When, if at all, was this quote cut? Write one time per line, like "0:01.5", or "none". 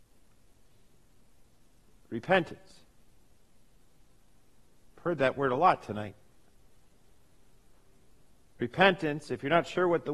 none